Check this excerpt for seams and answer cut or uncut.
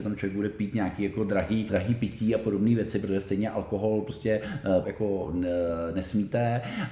cut